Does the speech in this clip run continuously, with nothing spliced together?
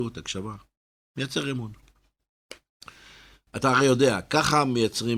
yes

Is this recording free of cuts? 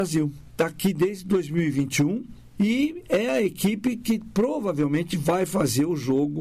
no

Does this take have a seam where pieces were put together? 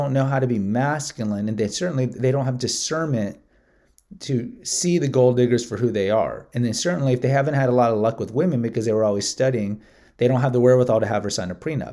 no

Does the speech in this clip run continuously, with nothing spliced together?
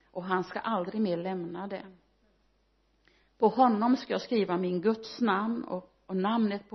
yes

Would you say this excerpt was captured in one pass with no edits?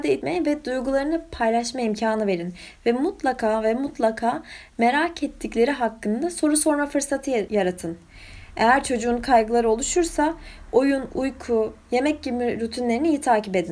yes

